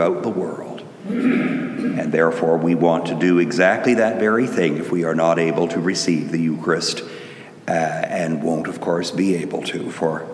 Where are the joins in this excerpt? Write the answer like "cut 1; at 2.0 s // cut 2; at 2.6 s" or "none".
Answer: none